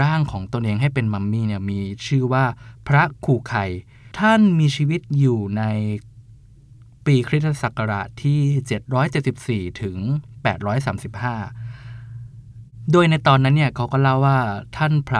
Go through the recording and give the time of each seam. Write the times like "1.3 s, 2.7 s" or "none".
4.1 s

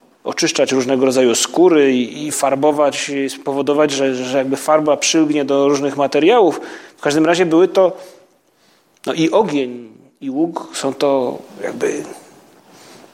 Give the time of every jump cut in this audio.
none

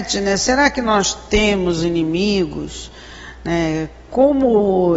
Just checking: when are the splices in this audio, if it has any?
none

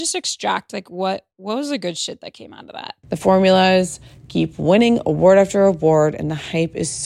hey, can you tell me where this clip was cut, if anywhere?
1.3 s, 3.0 s

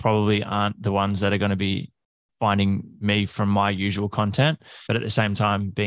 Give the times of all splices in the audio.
4.9 s

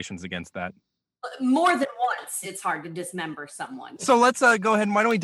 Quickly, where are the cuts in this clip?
4.0 s

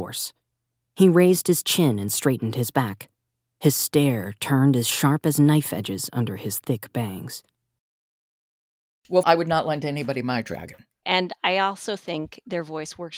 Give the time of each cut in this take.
9.2 s, 11.0 s

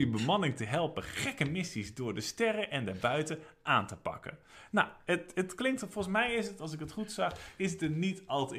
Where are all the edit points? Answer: none

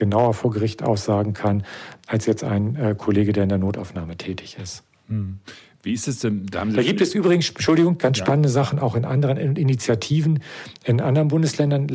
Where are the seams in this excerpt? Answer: none

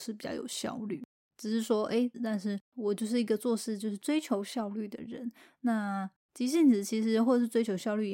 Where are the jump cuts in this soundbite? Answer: 2.1 s

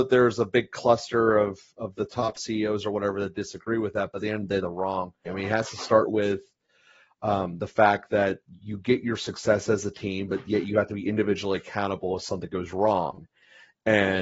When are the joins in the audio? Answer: 5.3 s

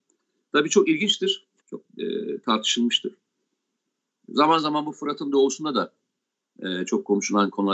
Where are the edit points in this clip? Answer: 1.6 s

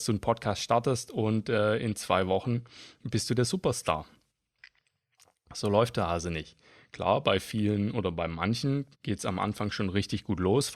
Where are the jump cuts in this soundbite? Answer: 8.9 s

